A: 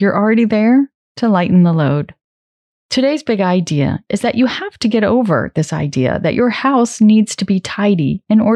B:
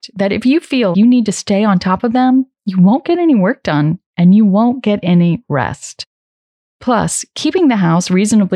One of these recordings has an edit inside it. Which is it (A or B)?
B